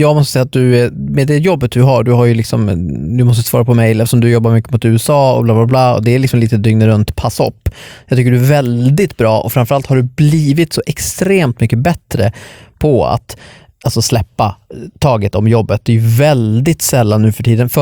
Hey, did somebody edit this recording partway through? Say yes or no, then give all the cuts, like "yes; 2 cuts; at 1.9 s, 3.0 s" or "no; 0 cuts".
no; 0 cuts